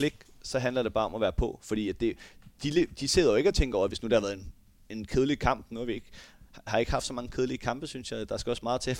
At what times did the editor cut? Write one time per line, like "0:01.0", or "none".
0:03.9